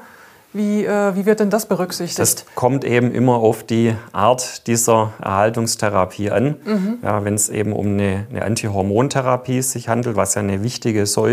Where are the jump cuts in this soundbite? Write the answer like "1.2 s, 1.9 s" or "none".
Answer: none